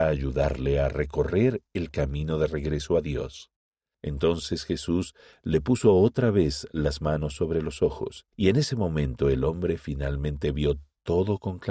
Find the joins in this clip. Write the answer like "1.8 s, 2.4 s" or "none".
3.9 s, 8.3 s